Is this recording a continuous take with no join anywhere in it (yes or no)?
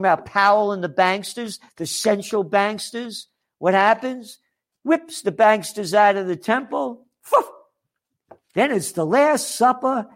yes